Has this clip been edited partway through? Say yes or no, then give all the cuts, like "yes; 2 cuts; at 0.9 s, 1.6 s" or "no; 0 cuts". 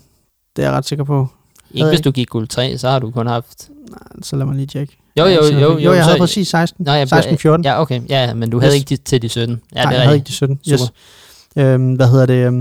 no; 0 cuts